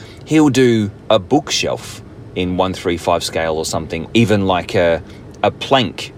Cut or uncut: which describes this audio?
cut